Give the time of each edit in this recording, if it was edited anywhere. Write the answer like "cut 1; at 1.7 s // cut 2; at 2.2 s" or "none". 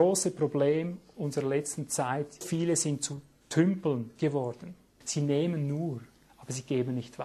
cut 1; at 2.4 s // cut 2; at 5.0 s